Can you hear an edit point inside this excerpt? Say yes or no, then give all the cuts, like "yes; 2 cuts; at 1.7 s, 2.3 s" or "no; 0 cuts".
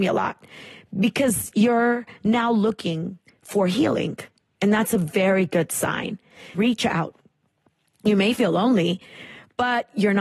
yes; 1 cut; at 6.5 s